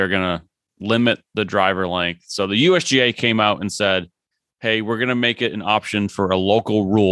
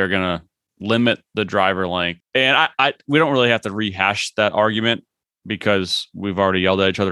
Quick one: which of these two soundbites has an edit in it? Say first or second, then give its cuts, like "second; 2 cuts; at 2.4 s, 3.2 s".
second; 1 cut; at 2.2 s